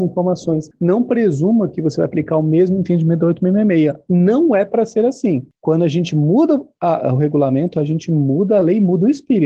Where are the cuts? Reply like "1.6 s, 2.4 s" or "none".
none